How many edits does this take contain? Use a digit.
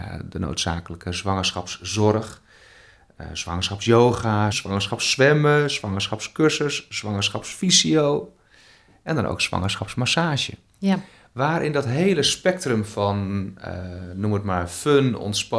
1